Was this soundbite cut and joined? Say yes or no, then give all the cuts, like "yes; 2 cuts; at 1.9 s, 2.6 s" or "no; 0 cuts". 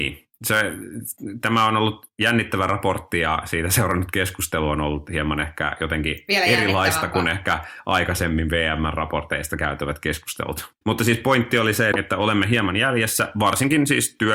yes; 2 cuts; at 10.8 s, 11.9 s